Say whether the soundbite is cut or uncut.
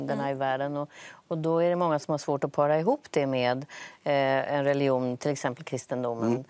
uncut